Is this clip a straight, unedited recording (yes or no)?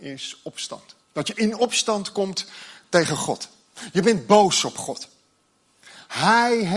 no